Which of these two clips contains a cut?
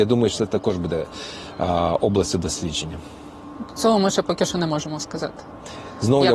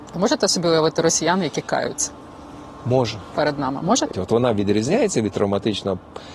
second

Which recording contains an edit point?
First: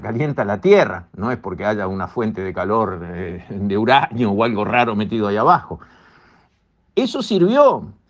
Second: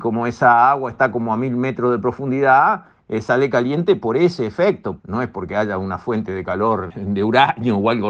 second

